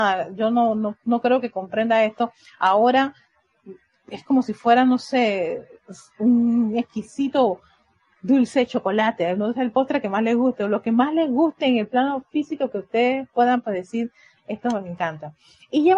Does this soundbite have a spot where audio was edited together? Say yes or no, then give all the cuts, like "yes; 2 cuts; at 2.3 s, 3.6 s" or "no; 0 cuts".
no; 0 cuts